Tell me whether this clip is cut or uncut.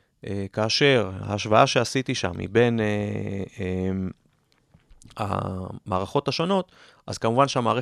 uncut